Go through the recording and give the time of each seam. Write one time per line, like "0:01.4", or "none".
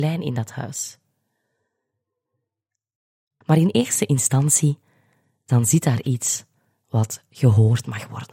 0:03.4